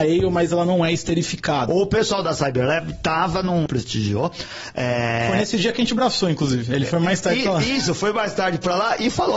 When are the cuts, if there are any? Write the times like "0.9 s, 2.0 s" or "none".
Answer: 1.7 s, 3.7 s